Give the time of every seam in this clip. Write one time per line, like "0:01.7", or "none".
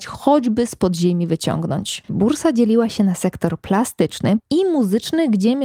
0:02.1
0:04.4